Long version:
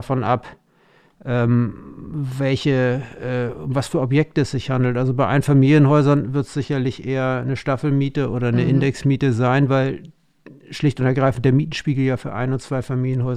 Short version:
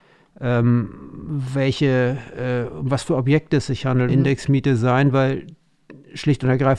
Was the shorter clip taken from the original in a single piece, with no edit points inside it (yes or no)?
no